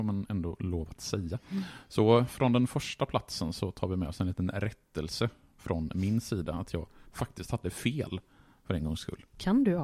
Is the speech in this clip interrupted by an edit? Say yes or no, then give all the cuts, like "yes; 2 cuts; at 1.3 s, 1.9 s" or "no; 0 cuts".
no; 0 cuts